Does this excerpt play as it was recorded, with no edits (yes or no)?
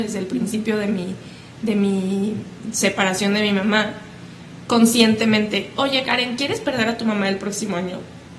no